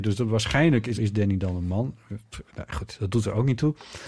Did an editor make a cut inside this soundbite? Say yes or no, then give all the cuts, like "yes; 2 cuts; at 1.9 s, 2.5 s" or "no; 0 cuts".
yes; 1 cut; at 1.0 s